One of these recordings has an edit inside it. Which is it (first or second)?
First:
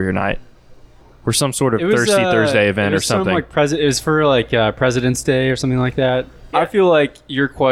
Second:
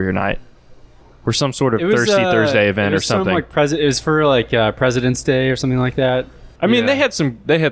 first